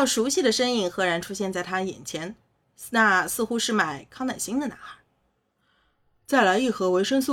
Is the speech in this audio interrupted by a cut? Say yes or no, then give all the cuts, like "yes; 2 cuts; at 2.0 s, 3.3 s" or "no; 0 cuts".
no; 0 cuts